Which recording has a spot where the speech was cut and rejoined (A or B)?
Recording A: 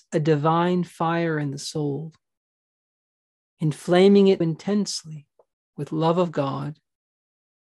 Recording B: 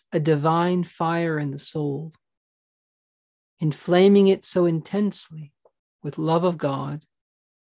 A